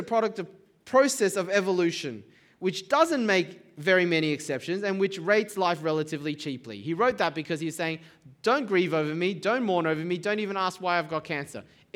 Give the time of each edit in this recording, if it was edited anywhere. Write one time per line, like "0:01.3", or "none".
none